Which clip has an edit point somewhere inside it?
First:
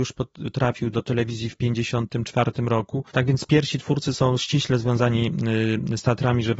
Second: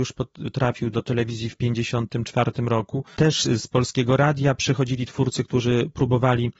first; 1 cut; at 3.1 s

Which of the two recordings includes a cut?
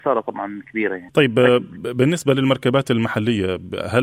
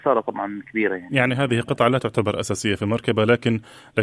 first; 1 cut; at 1.1 s

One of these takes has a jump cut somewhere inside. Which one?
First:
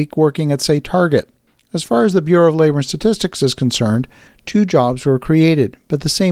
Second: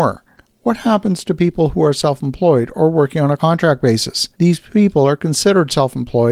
second; 1 cut; at 4.3 s

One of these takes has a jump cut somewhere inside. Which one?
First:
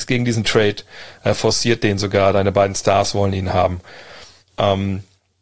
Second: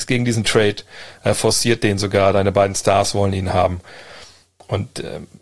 first; 1 cut; at 4.4 s

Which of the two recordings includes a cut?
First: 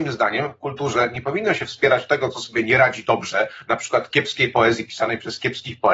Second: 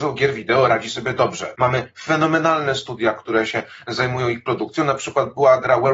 second; 1 cut; at 1.5 s

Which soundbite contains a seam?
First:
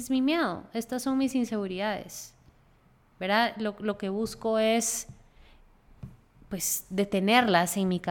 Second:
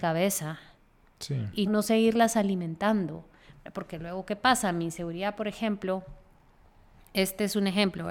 second; 1 cut; at 1.7 s

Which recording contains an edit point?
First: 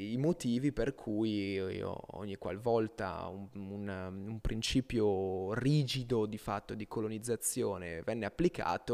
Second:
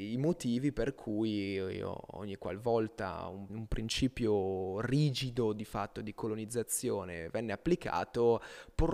second; 1 cut; at 3.5 s

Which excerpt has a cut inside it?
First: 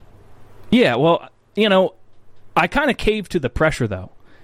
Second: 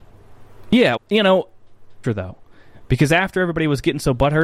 second; 2 cuts; at 1.0 s, 2.0 s

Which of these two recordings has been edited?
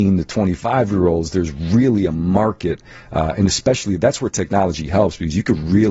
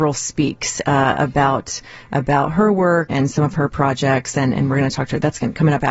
second; 1 cut; at 3.1 s

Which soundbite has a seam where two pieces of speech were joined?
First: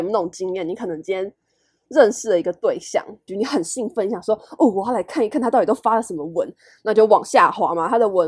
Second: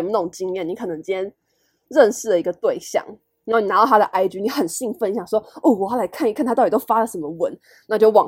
first; 1 cut; at 3.3 s

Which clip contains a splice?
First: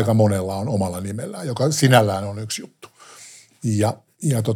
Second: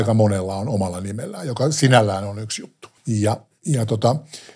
second; 1 cut; at 3.0 s

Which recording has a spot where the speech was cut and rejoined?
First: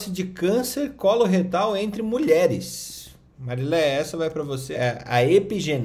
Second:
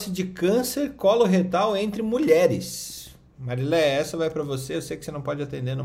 first; 1 cut; at 4.7 s

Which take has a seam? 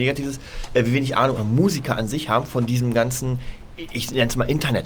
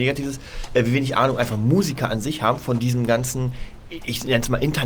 first; 1 cut; at 1.4 s

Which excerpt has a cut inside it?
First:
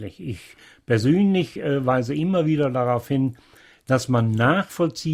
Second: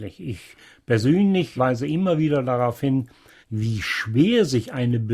second; 2 cuts; at 1.6 s, 3.4 s

